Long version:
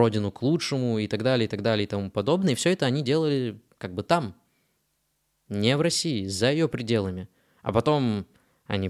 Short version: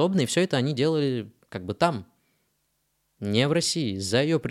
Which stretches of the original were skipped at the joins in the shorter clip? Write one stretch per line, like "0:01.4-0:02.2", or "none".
none